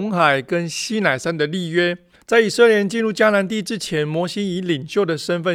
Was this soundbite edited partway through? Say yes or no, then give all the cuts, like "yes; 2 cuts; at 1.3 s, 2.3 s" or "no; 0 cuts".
yes; 1 cut; at 2.1 s